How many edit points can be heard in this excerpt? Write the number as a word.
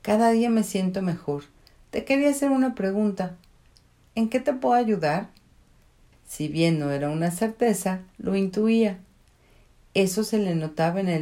one